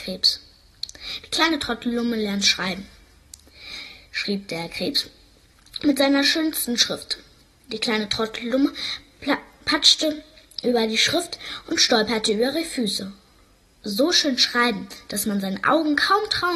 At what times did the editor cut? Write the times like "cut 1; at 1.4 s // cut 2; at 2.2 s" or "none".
cut 1; at 13.7 s